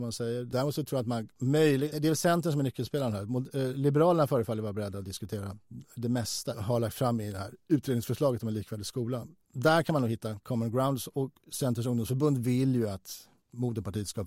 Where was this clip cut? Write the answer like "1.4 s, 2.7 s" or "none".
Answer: 1.9 s, 6.5 s